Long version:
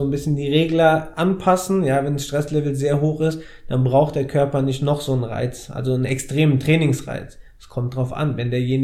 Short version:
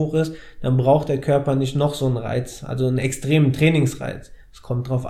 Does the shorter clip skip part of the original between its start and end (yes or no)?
no